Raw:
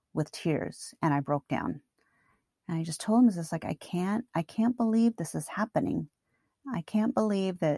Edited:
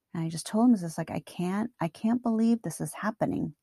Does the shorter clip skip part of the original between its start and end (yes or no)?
no